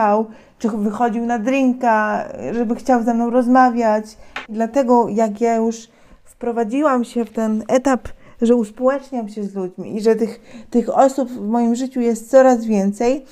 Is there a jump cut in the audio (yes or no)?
yes